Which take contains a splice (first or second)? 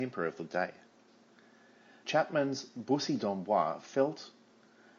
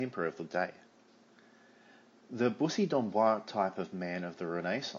first